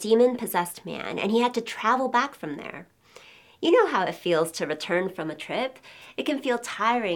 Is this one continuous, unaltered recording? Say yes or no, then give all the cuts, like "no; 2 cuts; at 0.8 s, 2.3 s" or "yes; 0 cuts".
yes; 0 cuts